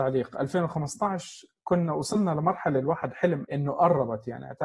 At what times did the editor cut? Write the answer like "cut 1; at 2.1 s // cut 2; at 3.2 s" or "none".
cut 1; at 3.4 s